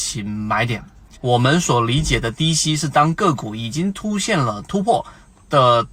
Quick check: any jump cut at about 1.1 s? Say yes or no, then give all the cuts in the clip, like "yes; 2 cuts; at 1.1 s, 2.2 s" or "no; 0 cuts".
yes; 1 cut; at 1.1 s